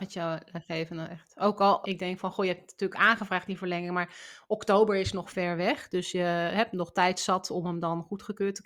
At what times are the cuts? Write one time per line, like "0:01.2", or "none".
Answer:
0:01.8